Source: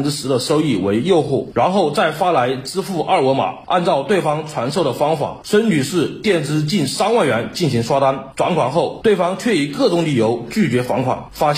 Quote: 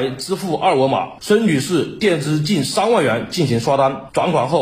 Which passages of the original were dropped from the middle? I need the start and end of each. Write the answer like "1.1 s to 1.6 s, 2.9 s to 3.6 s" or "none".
3.7 s to 5.4 s